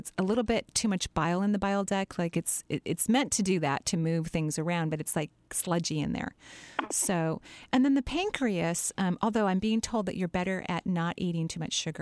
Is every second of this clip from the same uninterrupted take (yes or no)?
yes